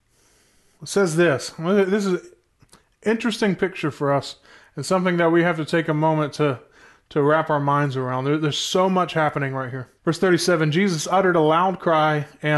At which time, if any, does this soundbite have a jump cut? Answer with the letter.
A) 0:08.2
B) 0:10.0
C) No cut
B